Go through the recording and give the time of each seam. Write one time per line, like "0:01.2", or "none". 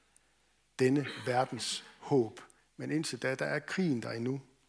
0:02.6